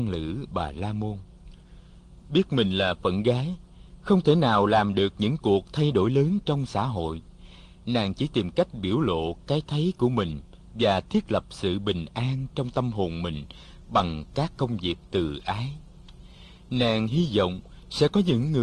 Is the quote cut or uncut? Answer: uncut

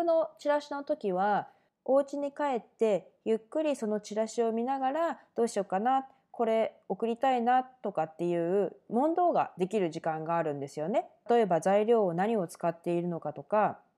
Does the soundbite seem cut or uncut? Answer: cut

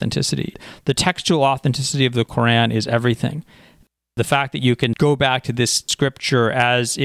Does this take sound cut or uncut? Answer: uncut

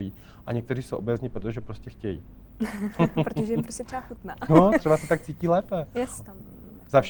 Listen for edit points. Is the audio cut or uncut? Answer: cut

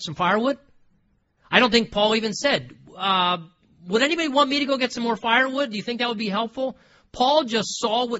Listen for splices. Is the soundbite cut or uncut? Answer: uncut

